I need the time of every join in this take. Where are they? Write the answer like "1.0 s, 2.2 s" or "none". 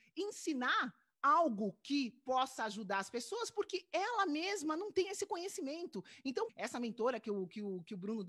6.5 s